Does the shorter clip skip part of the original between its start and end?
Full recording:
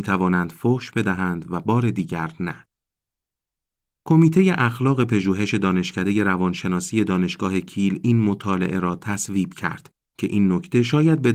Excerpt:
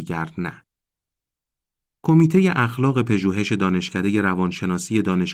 no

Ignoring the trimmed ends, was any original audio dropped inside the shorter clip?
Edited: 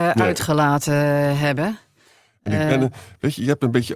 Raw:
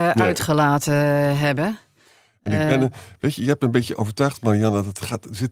no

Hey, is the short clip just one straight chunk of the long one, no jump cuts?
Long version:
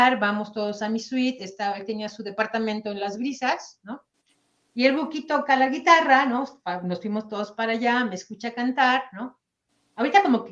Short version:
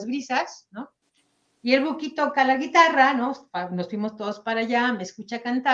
yes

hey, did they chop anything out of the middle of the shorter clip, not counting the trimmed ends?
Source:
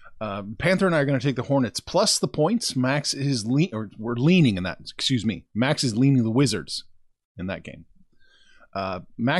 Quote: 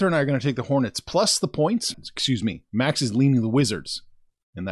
yes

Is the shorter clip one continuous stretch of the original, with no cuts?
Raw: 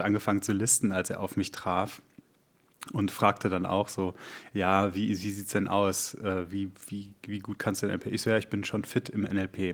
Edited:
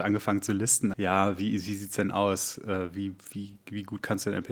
no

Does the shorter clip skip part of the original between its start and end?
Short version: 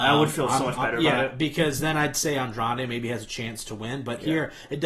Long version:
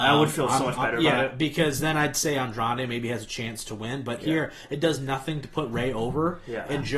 no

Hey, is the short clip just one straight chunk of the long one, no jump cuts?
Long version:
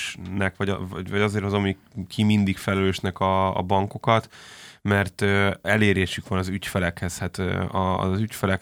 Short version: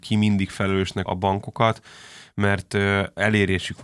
no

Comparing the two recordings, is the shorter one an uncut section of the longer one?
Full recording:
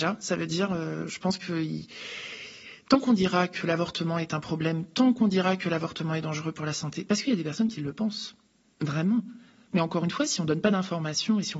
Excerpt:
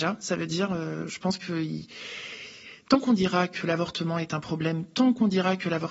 yes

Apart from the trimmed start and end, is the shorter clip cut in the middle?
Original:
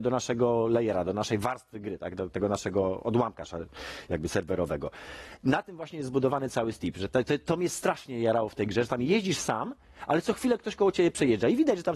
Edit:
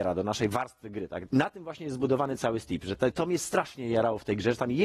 yes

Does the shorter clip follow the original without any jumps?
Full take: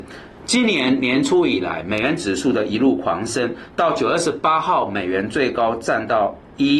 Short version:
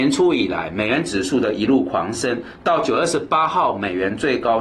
yes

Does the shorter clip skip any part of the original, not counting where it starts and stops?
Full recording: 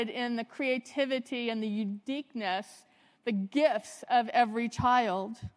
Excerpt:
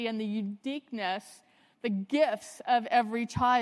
no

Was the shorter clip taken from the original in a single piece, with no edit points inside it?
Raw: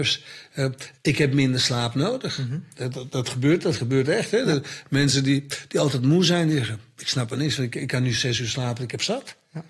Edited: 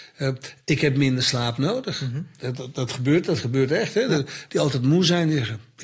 no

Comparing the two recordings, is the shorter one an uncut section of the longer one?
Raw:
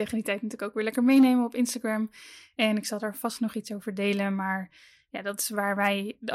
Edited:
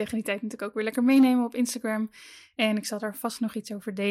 yes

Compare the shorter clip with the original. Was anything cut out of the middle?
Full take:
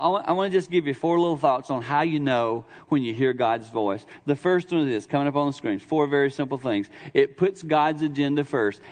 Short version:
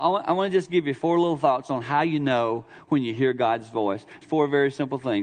yes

